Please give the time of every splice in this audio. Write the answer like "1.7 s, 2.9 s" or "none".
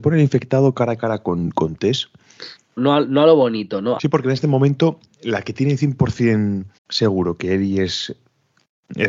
2.8 s, 4.0 s, 6.8 s